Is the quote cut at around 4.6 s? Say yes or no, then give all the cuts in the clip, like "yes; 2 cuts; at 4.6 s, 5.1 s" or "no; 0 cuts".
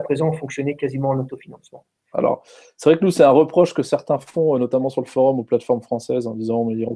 no; 1 cut; at 2.1 s